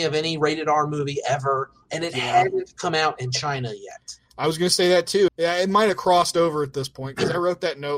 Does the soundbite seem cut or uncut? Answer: cut